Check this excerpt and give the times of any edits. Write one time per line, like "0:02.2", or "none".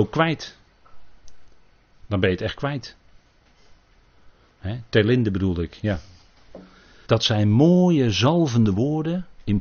0:07.1